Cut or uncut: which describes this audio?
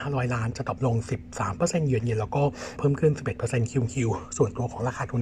cut